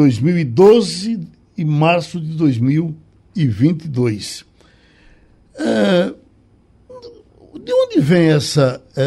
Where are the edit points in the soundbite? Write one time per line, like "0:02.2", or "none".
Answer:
none